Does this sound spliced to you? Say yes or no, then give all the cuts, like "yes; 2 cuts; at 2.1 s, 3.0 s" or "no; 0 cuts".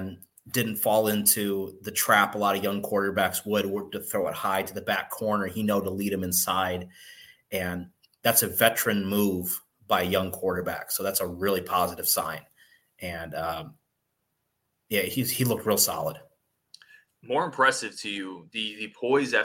no; 0 cuts